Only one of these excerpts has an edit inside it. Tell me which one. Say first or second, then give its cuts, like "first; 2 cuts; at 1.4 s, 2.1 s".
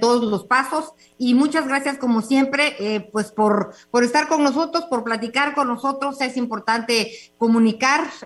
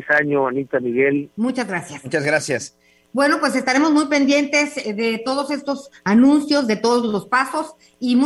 second; 2 cuts; at 1.3 s, 3.0 s